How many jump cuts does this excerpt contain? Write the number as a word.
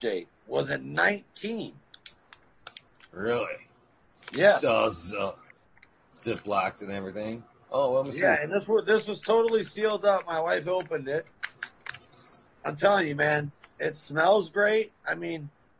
zero